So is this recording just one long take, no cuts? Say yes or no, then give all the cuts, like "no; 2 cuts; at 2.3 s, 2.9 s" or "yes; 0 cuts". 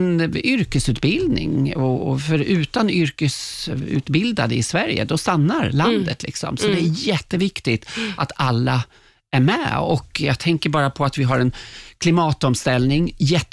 yes; 0 cuts